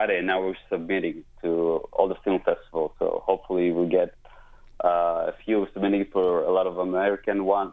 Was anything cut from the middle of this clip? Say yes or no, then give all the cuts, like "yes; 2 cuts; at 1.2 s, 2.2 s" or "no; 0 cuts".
no; 0 cuts